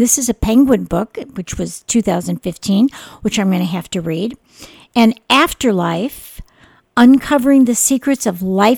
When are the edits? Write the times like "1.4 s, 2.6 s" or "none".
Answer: none

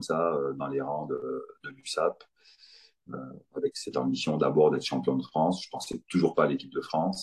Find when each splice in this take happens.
none

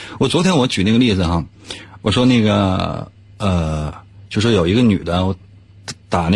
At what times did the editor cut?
none

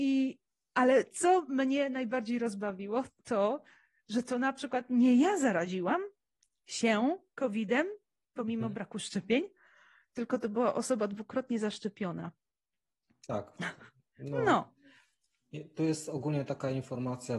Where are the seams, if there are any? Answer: 3.2 s

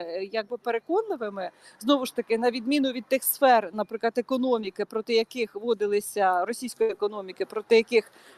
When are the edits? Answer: none

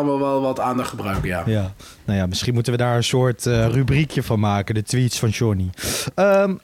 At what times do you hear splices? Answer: none

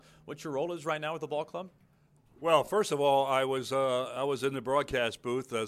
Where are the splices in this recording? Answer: none

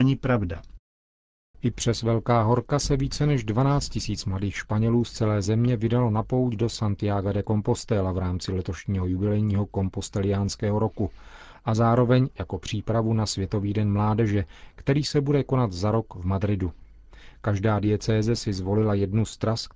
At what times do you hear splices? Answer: 1.5 s

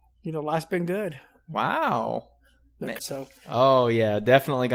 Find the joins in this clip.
3.0 s

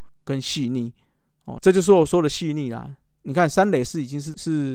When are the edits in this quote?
1.6 s

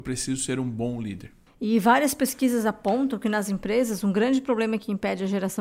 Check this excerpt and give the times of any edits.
none

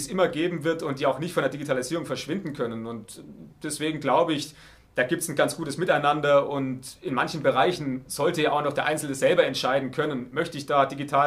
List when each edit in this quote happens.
5.4 s, 10.3 s

